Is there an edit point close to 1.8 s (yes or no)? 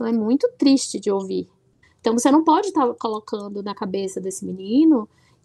yes